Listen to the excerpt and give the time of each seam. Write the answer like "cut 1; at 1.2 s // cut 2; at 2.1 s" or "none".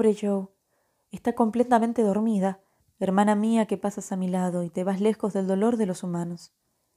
cut 1; at 2.8 s